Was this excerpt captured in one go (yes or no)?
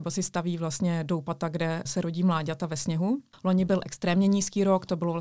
no